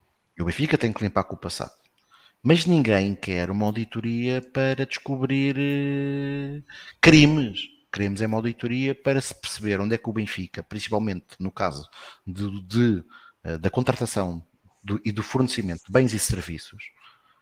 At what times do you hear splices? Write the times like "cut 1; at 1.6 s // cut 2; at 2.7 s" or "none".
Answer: none